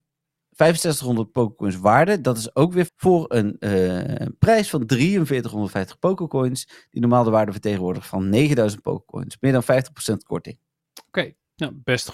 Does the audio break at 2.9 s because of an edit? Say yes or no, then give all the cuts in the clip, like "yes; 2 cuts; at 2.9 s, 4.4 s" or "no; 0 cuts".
yes; 1 cut; at 2.9 s